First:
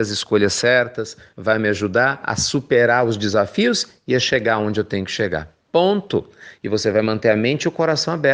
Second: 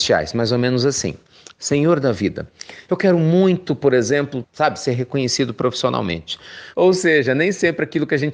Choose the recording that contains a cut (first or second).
second